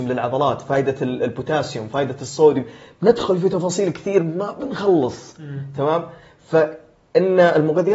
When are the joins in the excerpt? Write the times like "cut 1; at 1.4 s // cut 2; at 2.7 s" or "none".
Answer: none